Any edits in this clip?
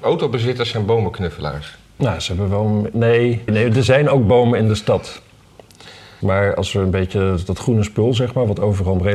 yes; 2 cuts; at 3.5 s, 6.2 s

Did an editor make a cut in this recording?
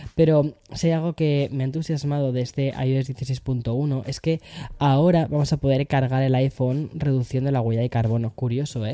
no; 0 cuts

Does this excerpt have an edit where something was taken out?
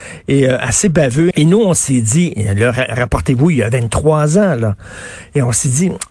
yes; 1 cut; at 1.3 s

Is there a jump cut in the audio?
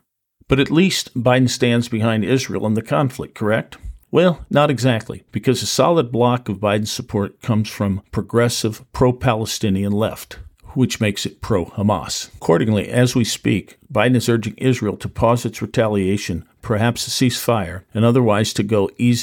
no; 0 cuts

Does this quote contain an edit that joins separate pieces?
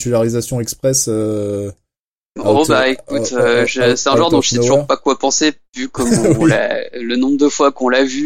yes; 1 cut; at 5.6 s

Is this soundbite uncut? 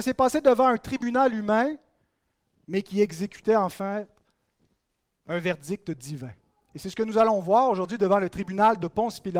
yes; 0 cuts

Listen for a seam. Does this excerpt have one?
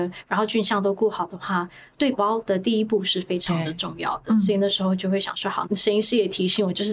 yes; 2 cuts; at 2.1 s, 5.6 s

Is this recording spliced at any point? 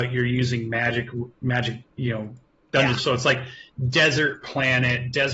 yes; 1 cut; at 3.0 s

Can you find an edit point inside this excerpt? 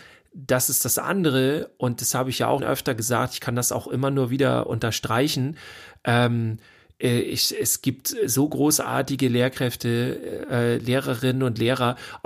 yes; 1 cut; at 2.6 s

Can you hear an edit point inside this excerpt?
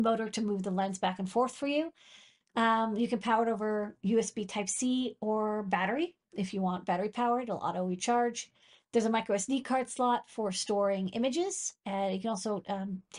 no; 0 cuts

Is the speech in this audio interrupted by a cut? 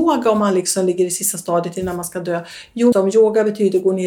yes; 1 cut; at 2.9 s

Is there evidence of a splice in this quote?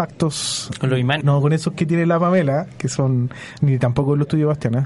yes; 1 cut; at 1.2 s

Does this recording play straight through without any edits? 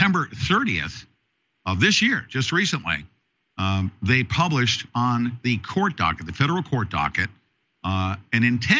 yes; 0 cuts

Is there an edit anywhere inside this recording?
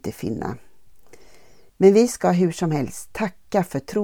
yes; 1 cut; at 1.7 s

